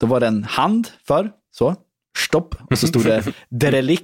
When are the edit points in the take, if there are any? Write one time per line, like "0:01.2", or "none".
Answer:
none